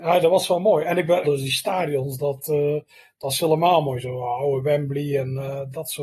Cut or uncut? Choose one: cut